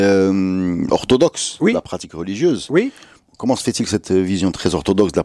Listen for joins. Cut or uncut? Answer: uncut